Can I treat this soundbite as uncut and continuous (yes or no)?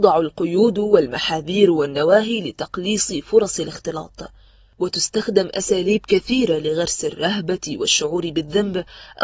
yes